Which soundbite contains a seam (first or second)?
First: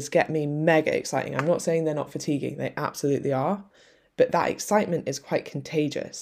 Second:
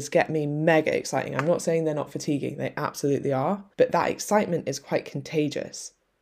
second